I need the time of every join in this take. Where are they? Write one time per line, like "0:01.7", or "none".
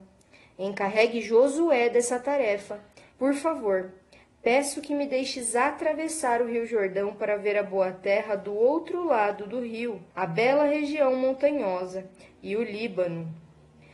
0:03.1
0:10.1